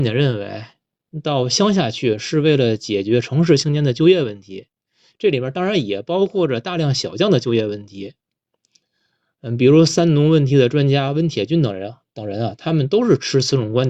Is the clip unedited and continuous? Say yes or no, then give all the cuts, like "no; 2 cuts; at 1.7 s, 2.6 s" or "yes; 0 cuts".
yes; 0 cuts